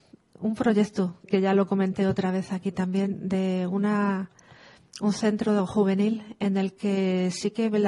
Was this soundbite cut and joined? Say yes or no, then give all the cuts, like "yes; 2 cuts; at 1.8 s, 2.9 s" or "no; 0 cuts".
yes; 1 cut; at 1.3 s